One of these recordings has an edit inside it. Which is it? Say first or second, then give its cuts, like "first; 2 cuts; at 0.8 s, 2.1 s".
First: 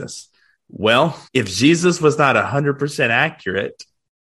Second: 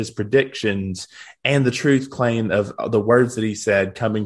first; 1 cut; at 1.3 s